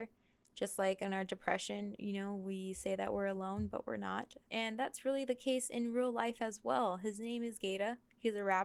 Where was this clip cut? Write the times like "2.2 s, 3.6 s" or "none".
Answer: 4.4 s

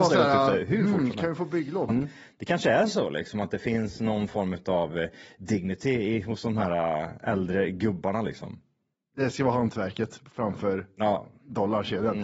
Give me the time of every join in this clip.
1.9 s

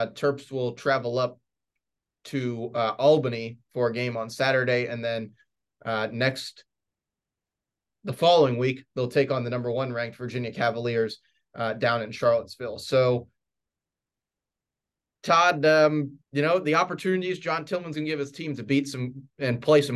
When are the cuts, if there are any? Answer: 16.2 s, 17.9 s

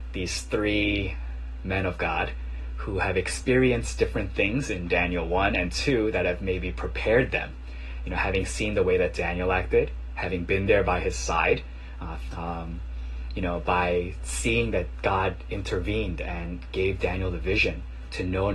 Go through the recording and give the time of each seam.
12.3 s

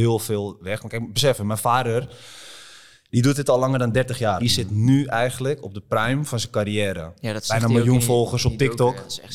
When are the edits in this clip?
4.4 s

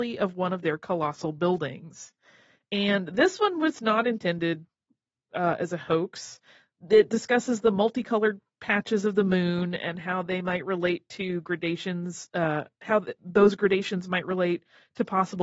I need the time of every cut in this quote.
none

